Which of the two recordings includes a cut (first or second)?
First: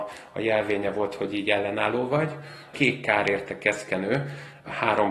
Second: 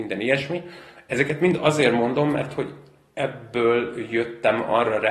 first